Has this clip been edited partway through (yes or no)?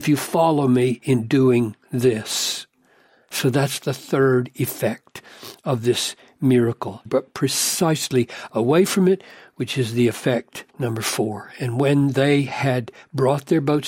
yes